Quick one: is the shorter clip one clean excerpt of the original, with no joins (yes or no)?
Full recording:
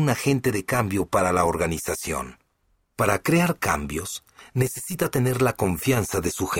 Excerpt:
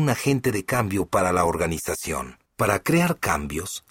no